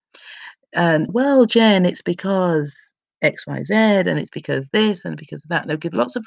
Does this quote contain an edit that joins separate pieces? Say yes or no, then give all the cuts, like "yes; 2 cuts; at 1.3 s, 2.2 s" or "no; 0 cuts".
yes; 1 cut; at 1.1 s